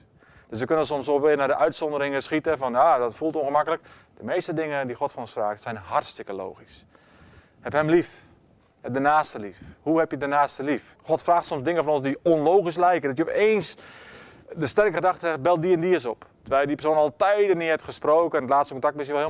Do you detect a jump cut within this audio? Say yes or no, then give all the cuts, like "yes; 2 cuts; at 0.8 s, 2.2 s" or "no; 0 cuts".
yes; 1 cut; at 11.0 s